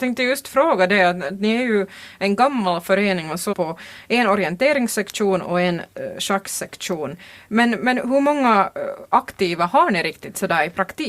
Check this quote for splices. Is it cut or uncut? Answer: cut